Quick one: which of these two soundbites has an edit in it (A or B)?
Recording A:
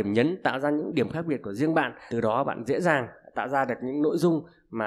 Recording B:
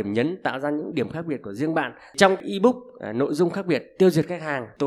A